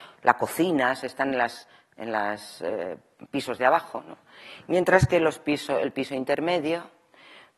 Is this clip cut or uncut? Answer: uncut